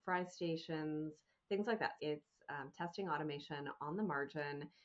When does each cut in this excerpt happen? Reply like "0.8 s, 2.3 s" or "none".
2.0 s